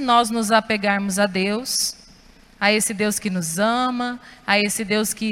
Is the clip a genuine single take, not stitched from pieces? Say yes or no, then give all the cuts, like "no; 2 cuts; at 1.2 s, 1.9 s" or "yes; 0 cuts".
yes; 0 cuts